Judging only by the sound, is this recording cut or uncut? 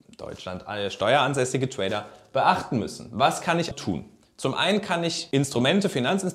cut